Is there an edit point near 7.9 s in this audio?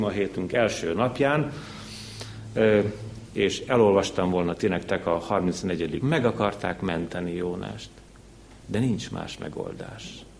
no; 2 cuts; at 3.2 s, 6.0 s

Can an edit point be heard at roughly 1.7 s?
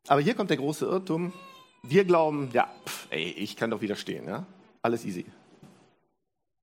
no; 1 cut; at 4.8 s

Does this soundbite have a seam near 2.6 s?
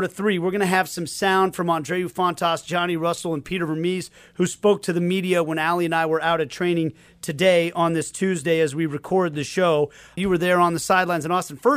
no; 1 cut; at 10.2 s

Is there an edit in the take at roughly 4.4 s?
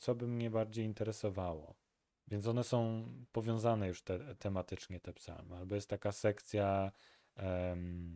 no; 1 cut; at 2.2 s

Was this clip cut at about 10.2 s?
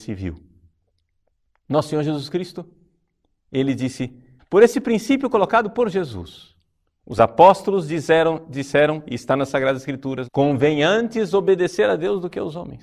yes; 2 cuts; at 4.4 s, 10.2 s

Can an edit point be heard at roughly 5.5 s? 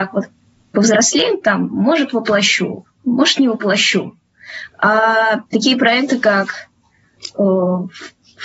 yes; 1 cut; at 5.5 s

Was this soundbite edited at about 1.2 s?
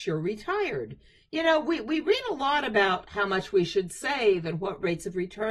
no; 0 cuts

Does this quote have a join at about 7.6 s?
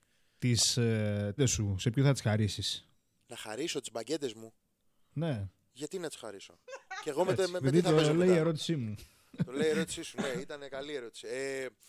yes; 2 cuts; at 1.4 s, 7.6 s

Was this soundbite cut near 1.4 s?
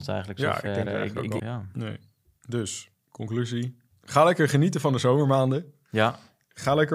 yes; 1 cut; at 1.4 s

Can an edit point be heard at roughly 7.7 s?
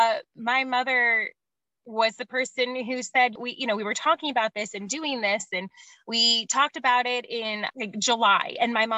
yes; 2 cuts; at 3.4 s, 7.7 s

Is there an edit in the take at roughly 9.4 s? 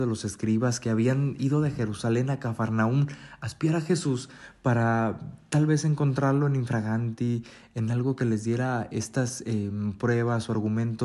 no; 1 cut; at 1.4 s

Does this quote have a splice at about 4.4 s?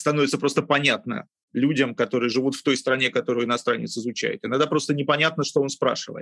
no; 0 cuts

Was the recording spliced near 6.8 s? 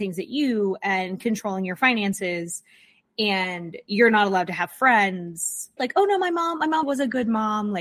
yes; 2 cuts; at 5.8 s, 6.8 s

